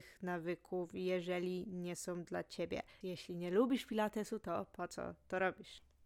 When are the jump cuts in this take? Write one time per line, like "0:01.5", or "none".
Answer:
0:03.0